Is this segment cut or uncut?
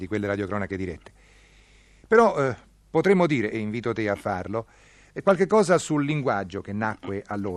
uncut